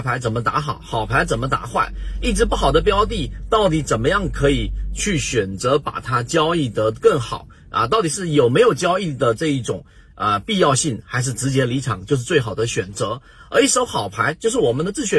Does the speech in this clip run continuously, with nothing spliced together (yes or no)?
yes